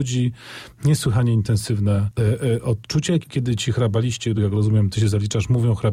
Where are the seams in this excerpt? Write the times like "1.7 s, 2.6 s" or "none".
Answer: 3.2 s, 4.4 s